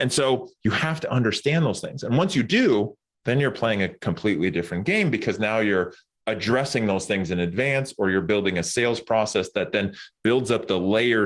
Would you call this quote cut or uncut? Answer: uncut